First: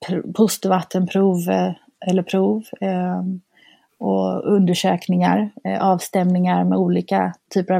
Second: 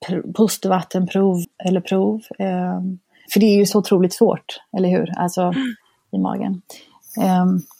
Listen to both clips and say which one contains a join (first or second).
second